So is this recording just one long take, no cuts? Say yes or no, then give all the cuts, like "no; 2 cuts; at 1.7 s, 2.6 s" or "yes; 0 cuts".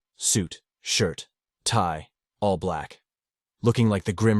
yes; 0 cuts